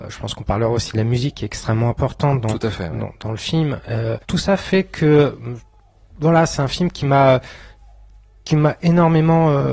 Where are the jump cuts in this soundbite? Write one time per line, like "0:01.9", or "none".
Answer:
0:04.2

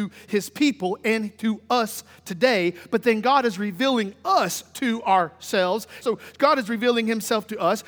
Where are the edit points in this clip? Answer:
0:06.0

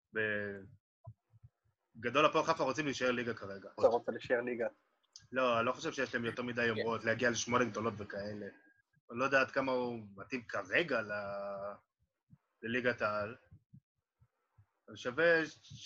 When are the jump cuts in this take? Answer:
0:03.8
0:08.9

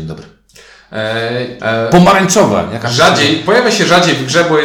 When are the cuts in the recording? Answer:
0:01.6

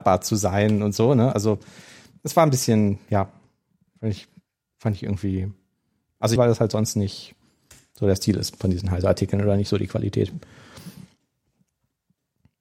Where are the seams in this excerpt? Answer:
0:06.4

